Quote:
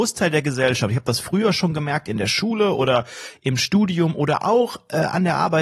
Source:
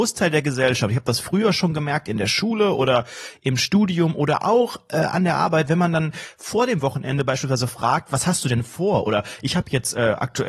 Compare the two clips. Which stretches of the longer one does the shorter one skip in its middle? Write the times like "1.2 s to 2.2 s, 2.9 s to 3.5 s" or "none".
none